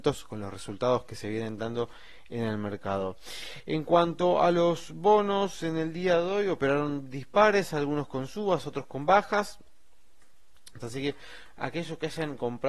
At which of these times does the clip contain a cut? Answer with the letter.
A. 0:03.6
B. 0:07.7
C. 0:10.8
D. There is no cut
C